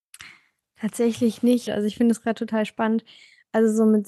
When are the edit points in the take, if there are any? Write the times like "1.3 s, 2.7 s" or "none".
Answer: 1.7 s